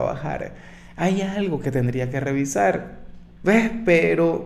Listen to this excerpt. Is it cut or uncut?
cut